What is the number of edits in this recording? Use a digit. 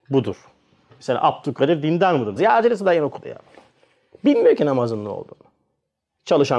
1